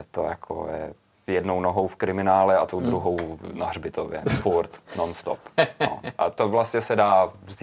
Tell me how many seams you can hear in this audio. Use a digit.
0